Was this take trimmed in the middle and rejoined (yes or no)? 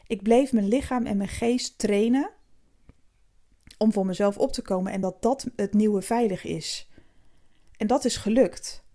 no